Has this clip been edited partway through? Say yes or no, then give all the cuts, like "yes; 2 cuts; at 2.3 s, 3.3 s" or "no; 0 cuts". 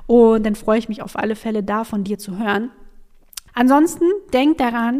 yes; 1 cut; at 3.5 s